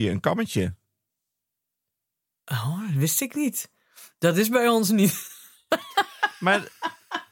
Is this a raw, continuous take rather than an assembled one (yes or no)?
yes